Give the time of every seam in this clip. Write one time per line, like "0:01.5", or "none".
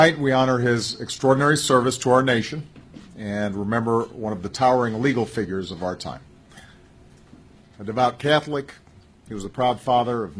0:07.6